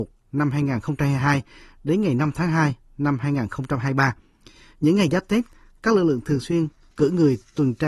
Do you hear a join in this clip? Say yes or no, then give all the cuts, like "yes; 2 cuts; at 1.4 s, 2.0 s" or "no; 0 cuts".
no; 0 cuts